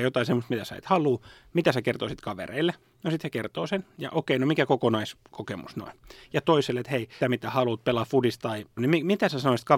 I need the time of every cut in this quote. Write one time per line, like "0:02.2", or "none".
0:07.2
0:08.8